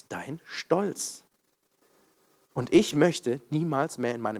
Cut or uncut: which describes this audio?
uncut